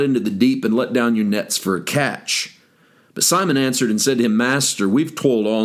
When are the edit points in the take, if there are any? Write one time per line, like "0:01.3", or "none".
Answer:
none